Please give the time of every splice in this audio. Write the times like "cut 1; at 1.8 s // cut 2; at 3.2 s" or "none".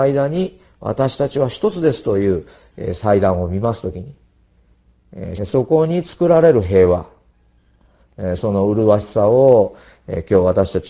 cut 1; at 5.4 s